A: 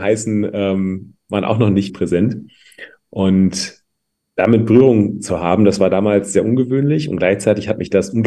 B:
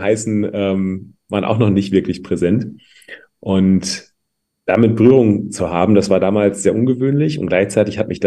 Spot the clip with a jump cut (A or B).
A